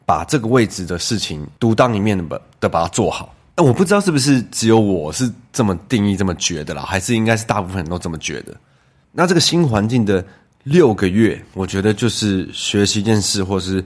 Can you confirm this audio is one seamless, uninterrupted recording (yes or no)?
yes